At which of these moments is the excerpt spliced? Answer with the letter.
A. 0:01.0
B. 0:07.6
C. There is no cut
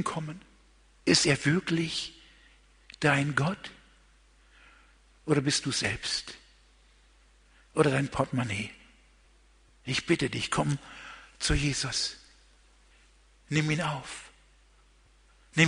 A